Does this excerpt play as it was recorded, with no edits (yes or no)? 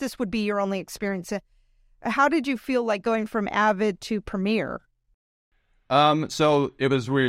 yes